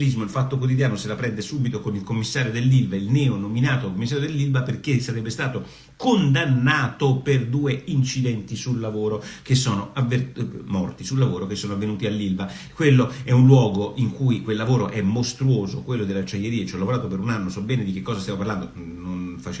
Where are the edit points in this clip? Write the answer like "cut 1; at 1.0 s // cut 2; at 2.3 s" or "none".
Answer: none